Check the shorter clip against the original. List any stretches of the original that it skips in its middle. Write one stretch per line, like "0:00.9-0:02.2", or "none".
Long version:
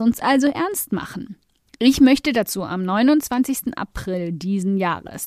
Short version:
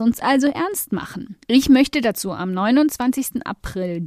0:01.4-0:01.7